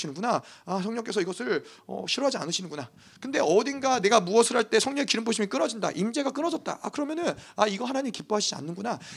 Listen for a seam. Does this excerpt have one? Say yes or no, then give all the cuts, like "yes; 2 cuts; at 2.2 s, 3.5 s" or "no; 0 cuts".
no; 0 cuts